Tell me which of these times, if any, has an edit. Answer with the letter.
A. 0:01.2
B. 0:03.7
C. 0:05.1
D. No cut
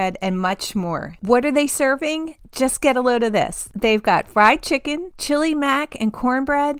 A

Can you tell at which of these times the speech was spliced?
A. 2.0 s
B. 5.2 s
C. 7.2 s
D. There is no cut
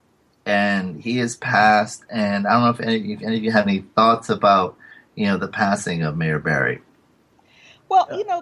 D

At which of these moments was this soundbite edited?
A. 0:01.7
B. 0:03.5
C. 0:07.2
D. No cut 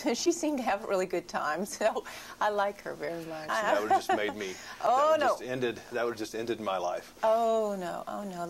B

